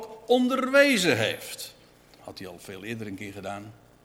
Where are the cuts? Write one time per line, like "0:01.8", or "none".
0:02.2

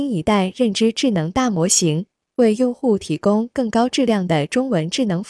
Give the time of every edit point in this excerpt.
0:02.3

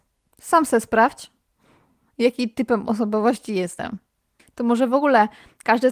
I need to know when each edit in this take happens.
0:04.4

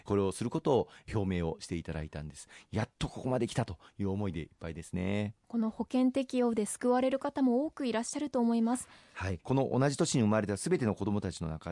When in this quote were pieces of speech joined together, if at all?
0:05.4
0:09.4

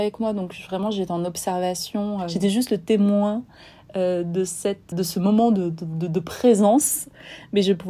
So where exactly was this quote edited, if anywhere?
0:04.9

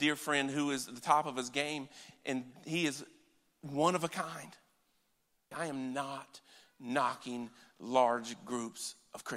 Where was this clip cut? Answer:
0:02.1
0:05.5

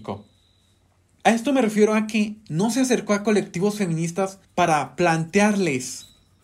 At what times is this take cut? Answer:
0:01.2
0:04.4

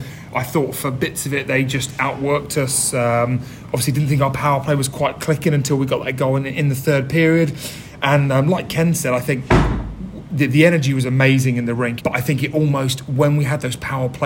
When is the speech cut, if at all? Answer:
0:12.0

